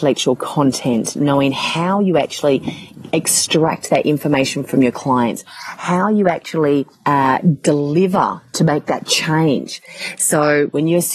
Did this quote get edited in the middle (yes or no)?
no